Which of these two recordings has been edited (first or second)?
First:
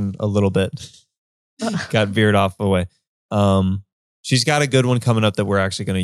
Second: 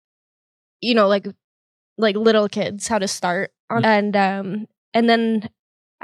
second